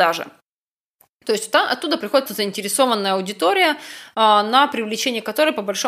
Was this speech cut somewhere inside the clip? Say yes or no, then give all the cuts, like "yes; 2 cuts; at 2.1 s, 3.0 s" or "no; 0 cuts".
yes; 1 cut; at 2.3 s